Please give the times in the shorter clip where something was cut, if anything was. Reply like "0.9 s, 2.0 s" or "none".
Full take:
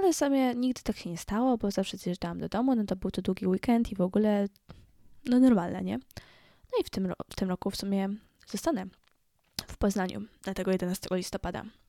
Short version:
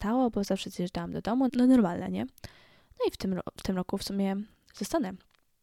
1.5 s